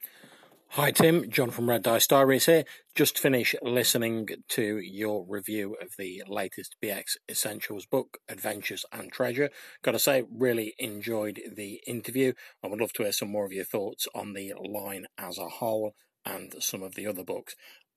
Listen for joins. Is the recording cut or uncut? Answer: uncut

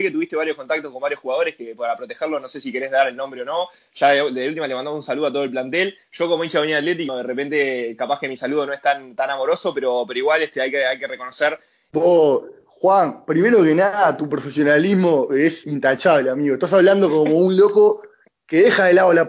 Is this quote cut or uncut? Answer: cut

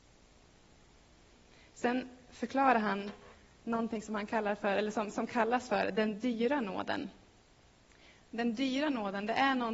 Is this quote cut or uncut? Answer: uncut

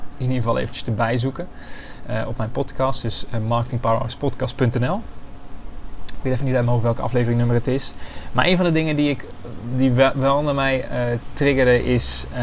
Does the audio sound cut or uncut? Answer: uncut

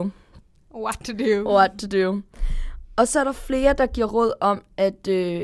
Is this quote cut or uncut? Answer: uncut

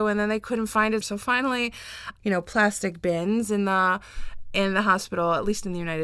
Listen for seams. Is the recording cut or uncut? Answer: cut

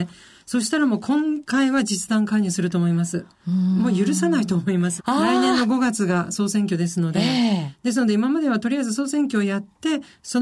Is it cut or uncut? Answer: cut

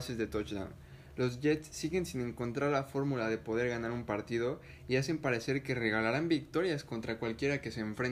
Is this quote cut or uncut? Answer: uncut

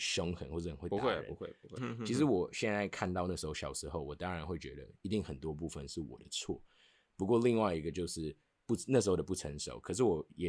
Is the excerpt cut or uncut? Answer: cut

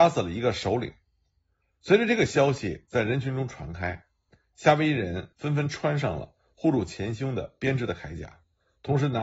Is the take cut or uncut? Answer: uncut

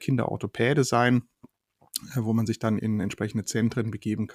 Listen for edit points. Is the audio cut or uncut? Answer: cut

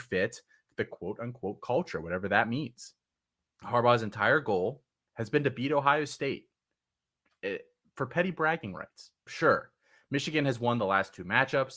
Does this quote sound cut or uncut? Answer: cut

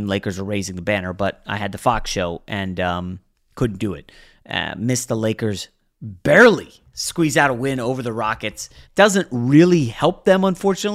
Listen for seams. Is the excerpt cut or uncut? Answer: cut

